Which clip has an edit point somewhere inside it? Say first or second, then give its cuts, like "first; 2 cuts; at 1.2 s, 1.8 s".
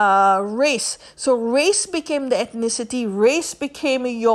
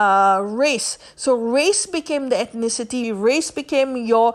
second; 1 cut; at 3.0 s